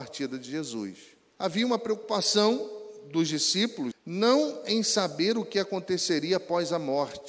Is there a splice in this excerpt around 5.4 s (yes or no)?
no